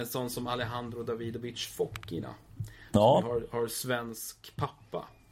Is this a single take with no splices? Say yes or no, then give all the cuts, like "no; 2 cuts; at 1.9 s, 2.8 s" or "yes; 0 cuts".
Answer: yes; 0 cuts